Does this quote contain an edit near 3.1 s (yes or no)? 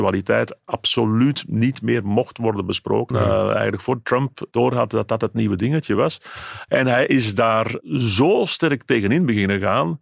yes